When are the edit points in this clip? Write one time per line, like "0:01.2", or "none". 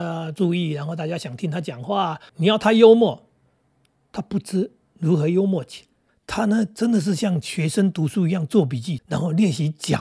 0:02.3
0:06.1
0:09.0